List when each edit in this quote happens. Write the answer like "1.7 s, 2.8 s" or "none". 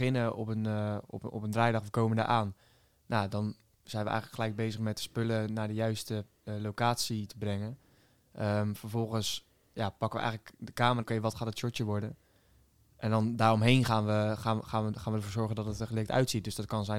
11.0 s